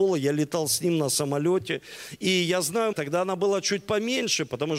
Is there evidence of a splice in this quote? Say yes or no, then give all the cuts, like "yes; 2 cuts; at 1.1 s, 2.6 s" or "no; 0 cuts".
yes; 1 cut; at 2.9 s